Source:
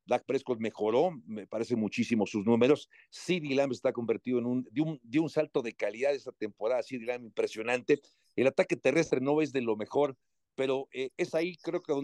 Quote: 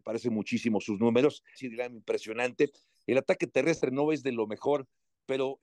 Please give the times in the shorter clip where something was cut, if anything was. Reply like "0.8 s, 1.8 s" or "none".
1.6 s

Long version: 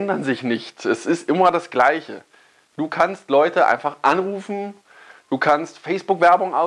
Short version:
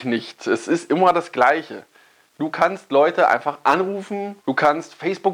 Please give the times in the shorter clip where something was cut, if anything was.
4.4 s

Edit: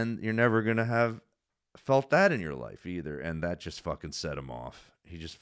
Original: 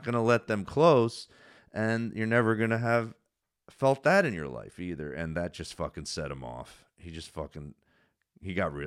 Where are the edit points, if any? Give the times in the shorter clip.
none

